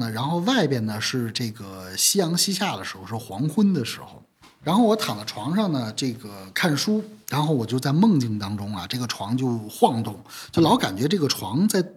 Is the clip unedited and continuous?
yes; 0 cuts

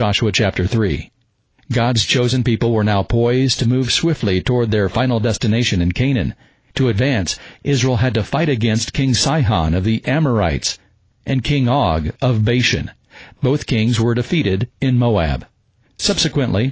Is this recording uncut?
yes; 0 cuts

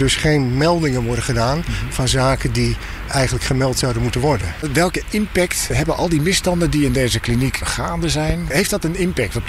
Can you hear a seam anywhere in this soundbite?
no; 0 cuts

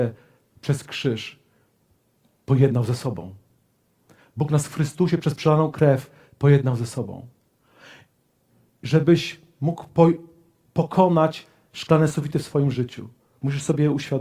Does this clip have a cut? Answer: no; 0 cuts

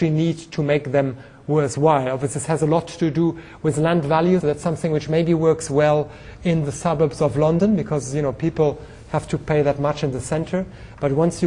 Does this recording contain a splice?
yes; 1 cut; at 4.4 s

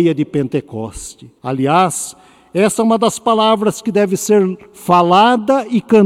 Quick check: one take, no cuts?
no; 1 cut; at 1.4 s

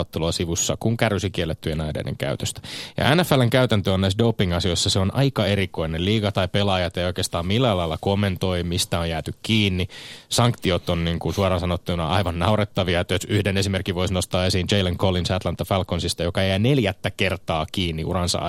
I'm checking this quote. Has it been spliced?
no; 0 cuts

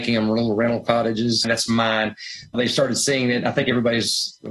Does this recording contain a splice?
yes; 2 cuts; at 1.4 s, 2.5 s

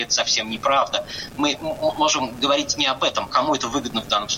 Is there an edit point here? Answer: yes; 1 cut; at 3.3 s

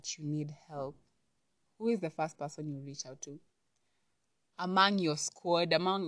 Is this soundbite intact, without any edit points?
no; 1 cut; at 1.6 s

